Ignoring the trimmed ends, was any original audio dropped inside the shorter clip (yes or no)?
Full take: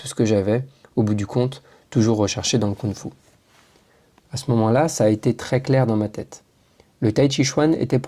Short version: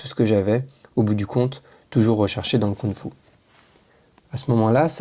no